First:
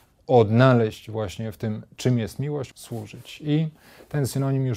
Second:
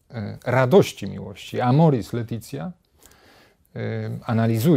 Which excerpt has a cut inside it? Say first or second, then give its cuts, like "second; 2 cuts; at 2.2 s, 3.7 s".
first; 1 cut; at 2.7 s